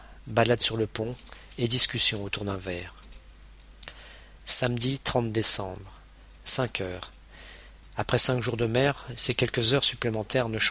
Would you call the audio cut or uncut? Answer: cut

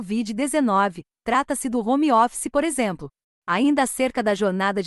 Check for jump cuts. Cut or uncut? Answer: uncut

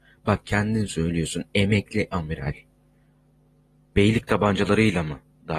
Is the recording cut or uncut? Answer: uncut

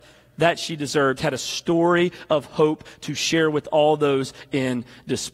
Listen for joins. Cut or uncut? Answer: uncut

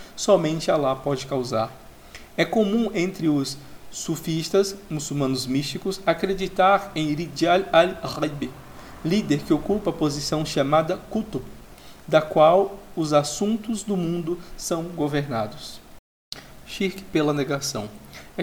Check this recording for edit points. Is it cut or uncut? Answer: uncut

